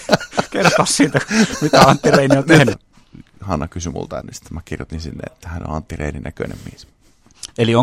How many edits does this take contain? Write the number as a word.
two